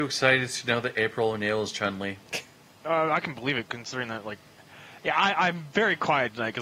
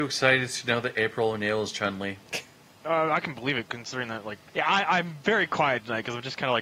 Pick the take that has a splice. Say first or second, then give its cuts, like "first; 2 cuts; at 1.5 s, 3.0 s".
second; 1 cut; at 4.5 s